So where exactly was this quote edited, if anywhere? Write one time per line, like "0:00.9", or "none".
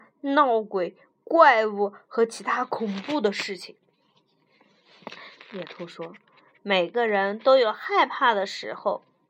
0:05.4